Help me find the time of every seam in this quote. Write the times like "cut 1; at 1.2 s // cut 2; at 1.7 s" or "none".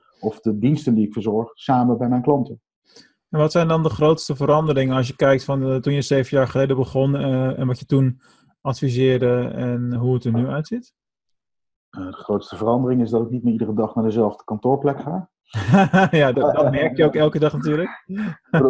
cut 1; at 10.0 s // cut 2; at 16.3 s